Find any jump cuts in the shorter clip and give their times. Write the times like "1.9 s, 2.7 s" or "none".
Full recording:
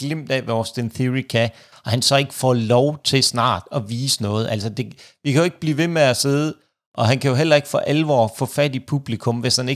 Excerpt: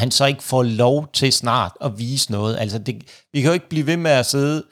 none

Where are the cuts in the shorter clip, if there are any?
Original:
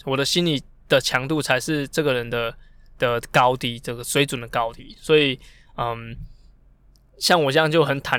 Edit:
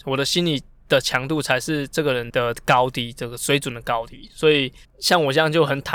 2.3 s, 4.8 s

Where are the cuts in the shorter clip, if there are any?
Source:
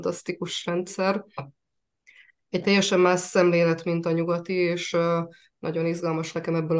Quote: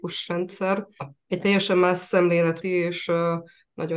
1.2 s, 2.6 s

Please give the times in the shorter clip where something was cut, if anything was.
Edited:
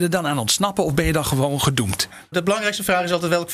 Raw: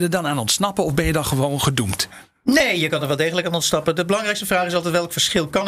2.3 s

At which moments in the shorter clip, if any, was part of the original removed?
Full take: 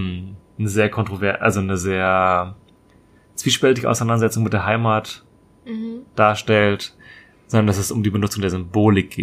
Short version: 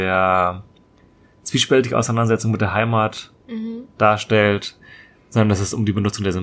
3.4 s

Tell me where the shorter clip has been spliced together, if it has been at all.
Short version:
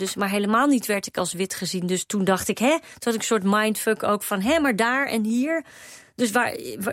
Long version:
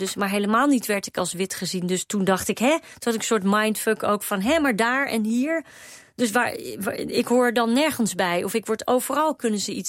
none

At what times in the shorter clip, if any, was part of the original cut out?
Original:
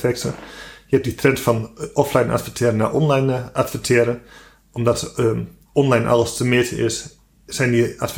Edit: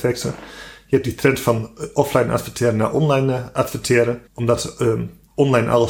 4.3 s

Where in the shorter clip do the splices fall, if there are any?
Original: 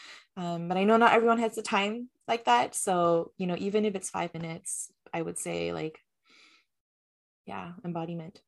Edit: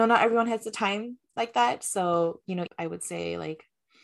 2.7 s

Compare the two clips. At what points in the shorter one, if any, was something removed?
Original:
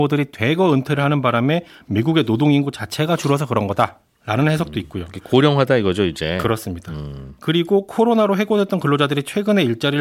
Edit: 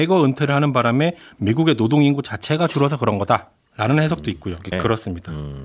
4.7 s

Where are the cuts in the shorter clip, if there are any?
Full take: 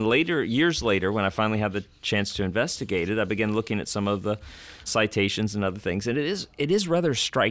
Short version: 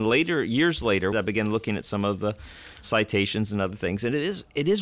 1.1 s

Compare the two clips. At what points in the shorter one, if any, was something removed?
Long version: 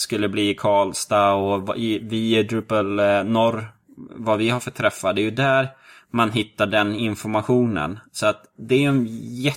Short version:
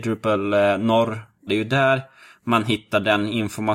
1.5 s

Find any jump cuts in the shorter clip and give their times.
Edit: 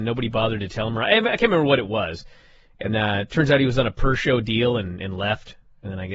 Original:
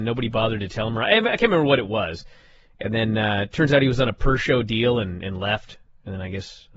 2.9 s

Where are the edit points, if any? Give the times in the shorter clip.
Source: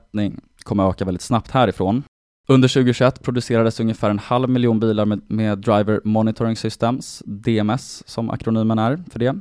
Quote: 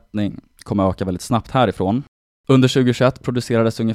none

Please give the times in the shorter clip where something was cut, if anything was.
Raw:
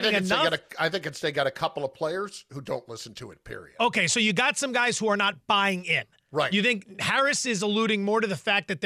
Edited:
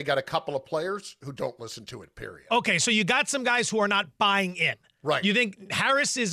none

